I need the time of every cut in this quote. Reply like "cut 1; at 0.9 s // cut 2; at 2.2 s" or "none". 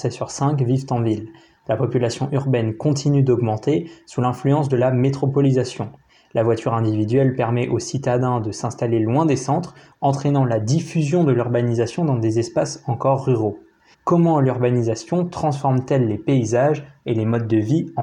cut 1; at 13.9 s